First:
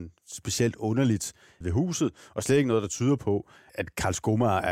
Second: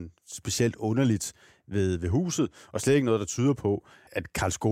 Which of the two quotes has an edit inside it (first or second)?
first